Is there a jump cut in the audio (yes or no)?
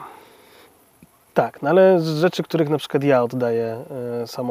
yes